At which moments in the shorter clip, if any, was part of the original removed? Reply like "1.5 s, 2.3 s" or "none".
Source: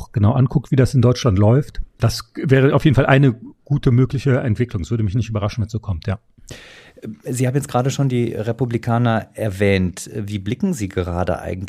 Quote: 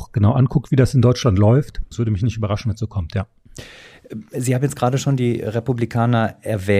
1.9 s